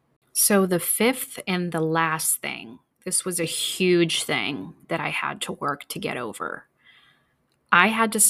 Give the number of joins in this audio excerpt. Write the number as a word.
zero